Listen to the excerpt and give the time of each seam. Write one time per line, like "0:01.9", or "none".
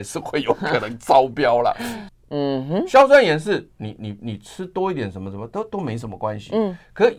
0:02.1